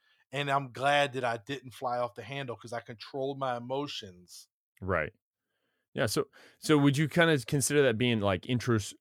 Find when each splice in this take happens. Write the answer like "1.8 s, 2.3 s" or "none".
none